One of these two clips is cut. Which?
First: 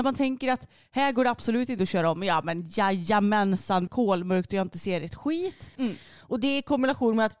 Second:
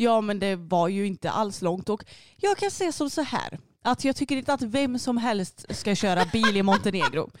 first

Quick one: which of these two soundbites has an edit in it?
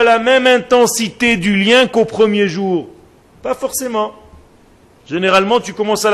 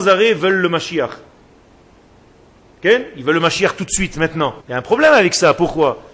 second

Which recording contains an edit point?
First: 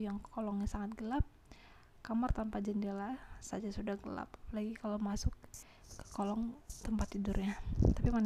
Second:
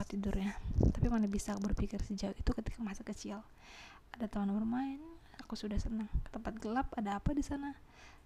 second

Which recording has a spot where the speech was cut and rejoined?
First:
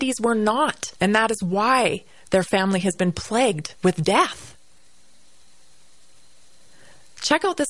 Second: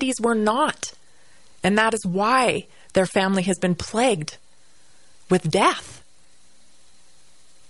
first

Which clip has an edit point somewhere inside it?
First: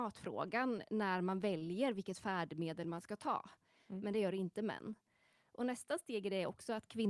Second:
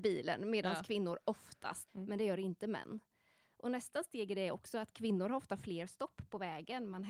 second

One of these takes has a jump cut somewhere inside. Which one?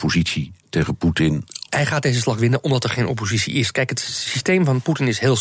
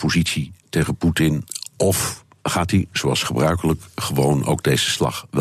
first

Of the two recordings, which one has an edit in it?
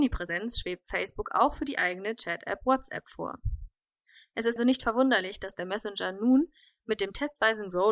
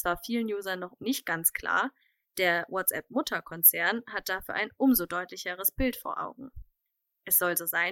first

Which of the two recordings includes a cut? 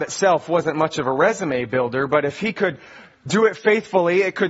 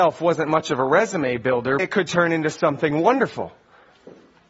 second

